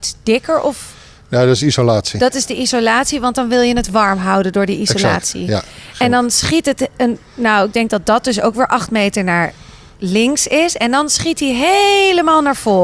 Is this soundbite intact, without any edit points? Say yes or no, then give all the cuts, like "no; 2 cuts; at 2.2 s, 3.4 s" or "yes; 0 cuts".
yes; 0 cuts